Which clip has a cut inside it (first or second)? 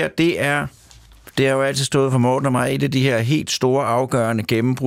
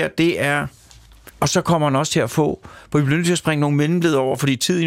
second